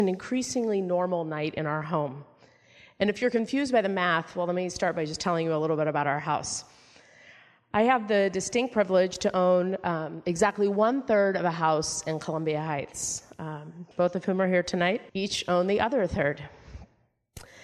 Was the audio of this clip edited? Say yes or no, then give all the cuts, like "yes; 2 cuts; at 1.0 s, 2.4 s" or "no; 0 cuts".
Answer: yes; 2 cuts; at 13.9 s, 15.1 s